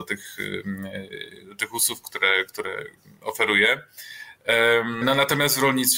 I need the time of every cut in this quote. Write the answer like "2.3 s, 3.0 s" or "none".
5.0 s

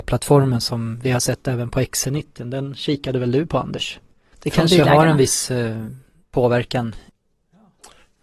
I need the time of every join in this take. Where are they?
4.3 s

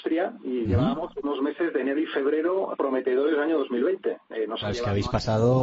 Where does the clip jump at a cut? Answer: 2.7 s, 4.2 s

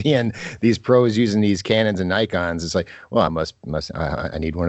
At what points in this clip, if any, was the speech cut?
none

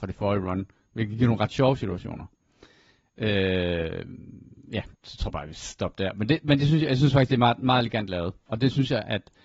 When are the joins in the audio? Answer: 5.0 s

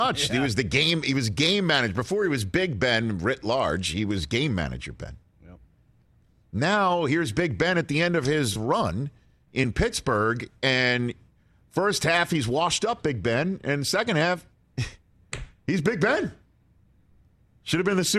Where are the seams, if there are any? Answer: none

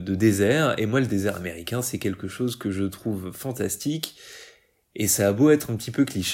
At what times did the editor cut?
none

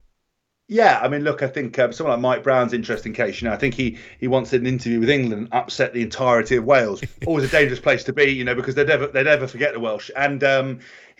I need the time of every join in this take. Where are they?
7.0 s

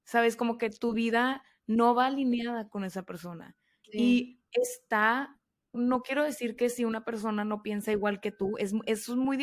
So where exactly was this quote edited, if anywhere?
3.8 s, 5.7 s

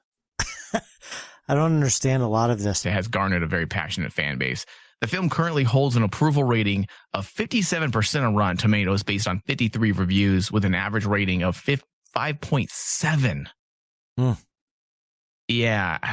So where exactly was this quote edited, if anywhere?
2.8 s

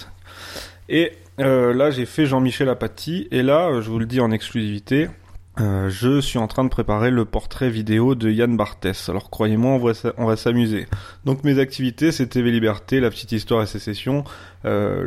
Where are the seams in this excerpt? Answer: 5.5 s

